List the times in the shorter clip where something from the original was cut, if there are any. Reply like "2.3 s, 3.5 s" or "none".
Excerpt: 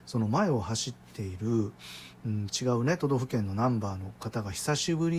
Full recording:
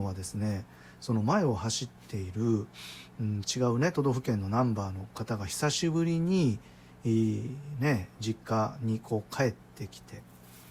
none